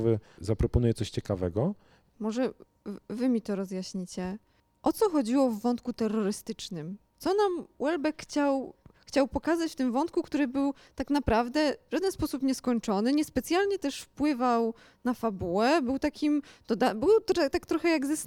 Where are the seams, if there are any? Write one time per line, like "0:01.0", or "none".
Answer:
0:02.1